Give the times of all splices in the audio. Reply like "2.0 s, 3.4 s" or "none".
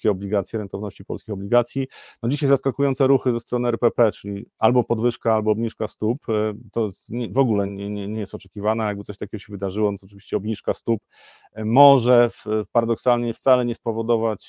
7.7 s